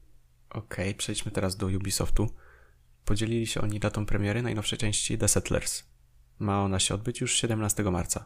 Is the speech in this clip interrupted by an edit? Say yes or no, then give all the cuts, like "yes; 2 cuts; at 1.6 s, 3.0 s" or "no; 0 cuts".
no; 0 cuts